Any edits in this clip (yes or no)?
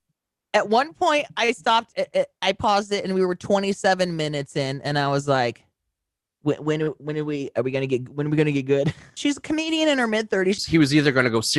yes